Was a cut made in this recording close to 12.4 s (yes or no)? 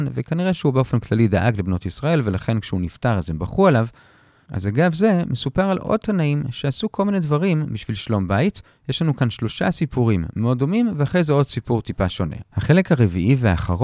yes